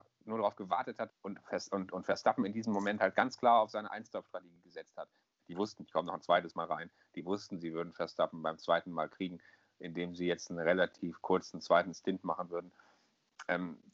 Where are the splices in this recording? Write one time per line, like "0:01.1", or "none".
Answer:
0:01.1
0:05.4